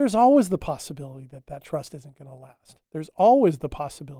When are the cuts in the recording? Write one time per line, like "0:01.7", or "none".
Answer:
none